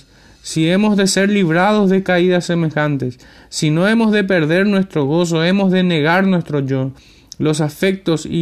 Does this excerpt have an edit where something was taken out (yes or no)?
no